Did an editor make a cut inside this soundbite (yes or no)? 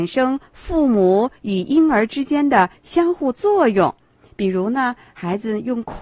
no